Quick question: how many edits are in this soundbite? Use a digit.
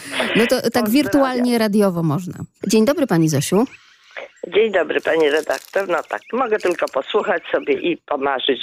1